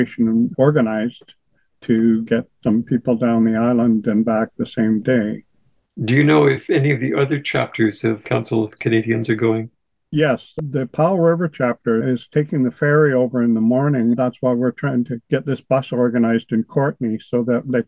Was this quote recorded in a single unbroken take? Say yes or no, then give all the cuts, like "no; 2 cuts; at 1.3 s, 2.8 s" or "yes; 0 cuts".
yes; 0 cuts